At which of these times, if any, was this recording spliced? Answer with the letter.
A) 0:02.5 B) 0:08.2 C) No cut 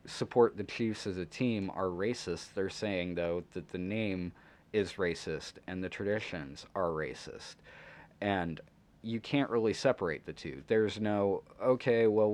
C